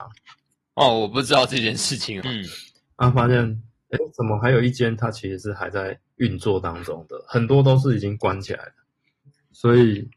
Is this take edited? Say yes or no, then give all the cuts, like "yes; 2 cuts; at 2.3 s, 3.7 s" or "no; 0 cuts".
yes; 1 cut; at 2.2 s